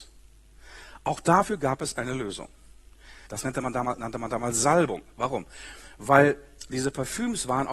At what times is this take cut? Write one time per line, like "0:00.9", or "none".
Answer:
0:03.3